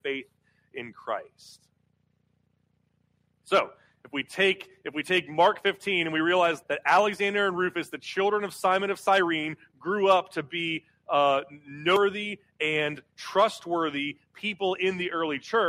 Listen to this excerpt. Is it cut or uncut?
cut